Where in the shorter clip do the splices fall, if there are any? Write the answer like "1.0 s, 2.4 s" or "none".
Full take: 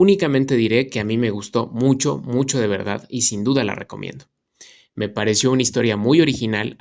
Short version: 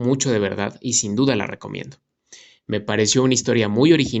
none